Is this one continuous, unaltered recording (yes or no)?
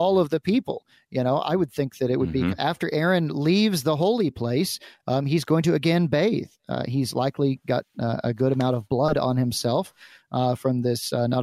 no